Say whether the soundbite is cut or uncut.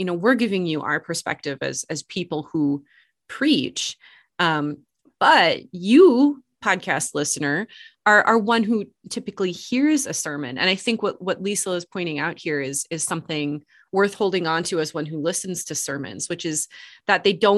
uncut